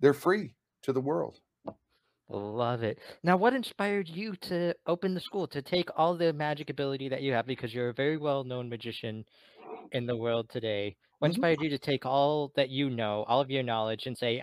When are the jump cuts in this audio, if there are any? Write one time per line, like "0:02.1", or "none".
none